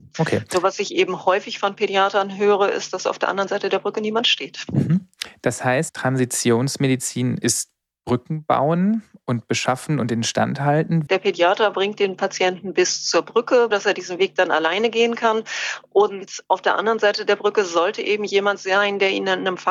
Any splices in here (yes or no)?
yes